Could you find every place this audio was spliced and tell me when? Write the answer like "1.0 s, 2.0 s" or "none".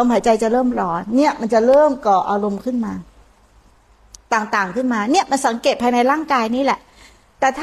none